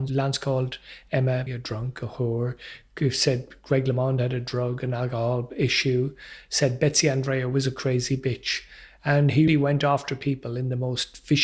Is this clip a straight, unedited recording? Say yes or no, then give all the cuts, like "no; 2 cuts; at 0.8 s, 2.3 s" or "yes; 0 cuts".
no; 2 cuts; at 1.5 s, 9.5 s